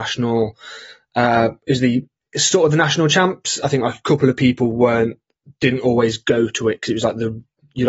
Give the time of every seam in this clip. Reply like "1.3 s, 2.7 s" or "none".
none